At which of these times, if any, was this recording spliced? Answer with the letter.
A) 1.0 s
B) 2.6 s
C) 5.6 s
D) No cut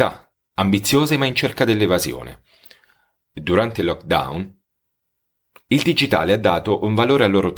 D